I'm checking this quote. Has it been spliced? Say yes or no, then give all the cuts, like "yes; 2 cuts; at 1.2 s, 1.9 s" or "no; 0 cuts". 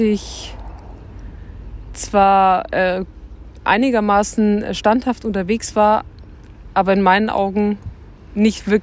no; 0 cuts